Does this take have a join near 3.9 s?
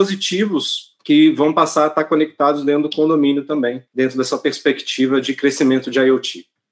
yes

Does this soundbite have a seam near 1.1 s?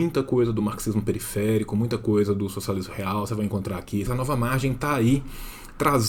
no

